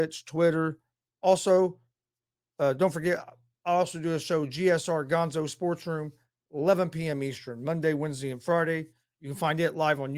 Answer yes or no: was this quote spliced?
yes